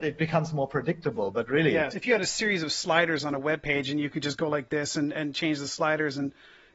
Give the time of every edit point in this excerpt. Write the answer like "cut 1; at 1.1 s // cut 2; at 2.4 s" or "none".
cut 1; at 1.9 s